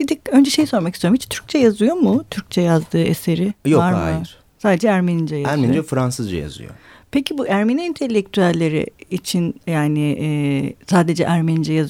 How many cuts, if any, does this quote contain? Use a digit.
0